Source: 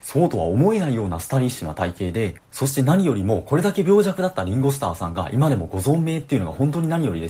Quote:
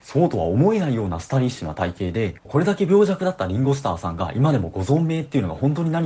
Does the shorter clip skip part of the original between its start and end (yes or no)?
yes